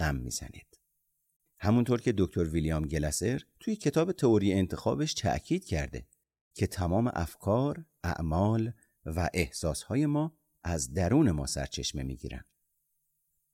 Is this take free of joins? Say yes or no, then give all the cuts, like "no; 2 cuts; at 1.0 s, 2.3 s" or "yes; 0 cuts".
yes; 0 cuts